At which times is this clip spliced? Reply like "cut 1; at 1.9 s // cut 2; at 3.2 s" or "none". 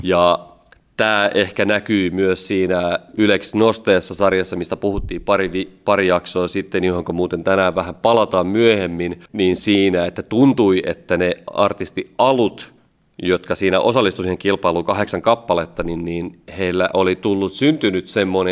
cut 1; at 9.3 s